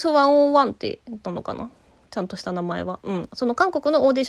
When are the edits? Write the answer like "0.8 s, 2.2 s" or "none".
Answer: none